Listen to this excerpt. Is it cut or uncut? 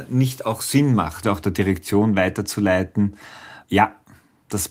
cut